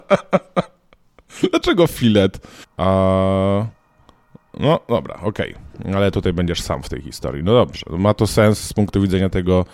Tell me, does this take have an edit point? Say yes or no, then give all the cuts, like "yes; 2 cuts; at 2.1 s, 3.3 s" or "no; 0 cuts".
yes; 1 cut; at 2.6 s